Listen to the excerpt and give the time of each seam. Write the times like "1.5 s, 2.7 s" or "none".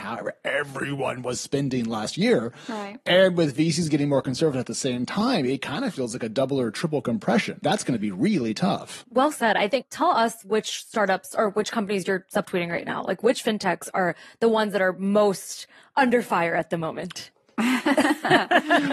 17.3 s

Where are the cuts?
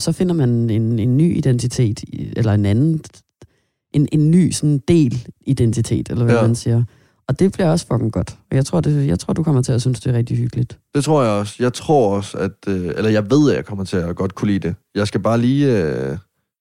none

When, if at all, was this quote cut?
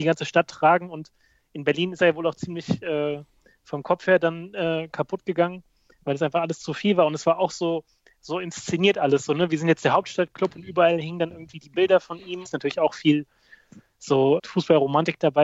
12.4 s, 14.4 s

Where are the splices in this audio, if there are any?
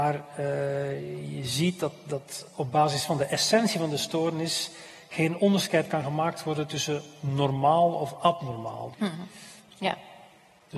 8.9 s

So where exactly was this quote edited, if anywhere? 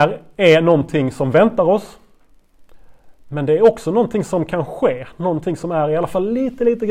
none

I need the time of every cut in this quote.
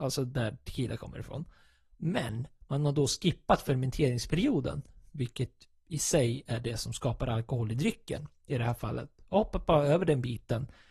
1.8 s

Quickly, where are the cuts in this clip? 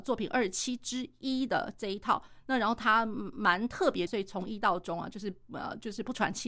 4.1 s

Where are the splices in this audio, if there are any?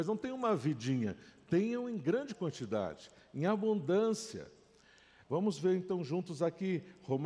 5.2 s

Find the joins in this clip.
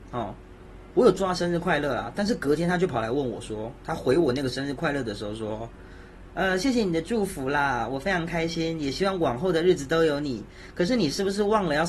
none

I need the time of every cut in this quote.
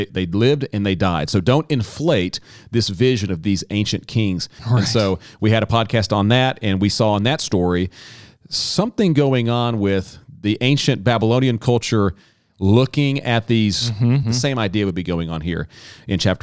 4.6 s, 14.2 s

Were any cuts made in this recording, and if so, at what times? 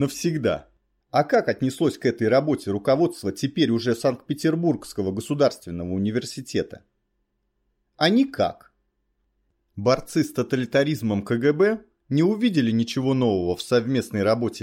1.0 s

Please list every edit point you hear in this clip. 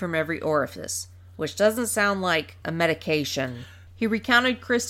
2.6 s, 3.9 s

